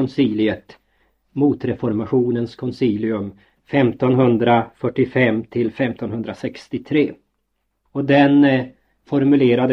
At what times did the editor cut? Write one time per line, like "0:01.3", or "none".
0:07.9